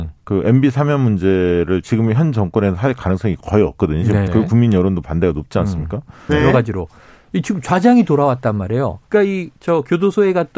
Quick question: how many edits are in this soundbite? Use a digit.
3